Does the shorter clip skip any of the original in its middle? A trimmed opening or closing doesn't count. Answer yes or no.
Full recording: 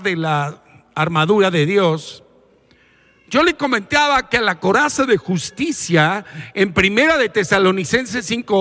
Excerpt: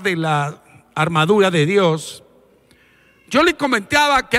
no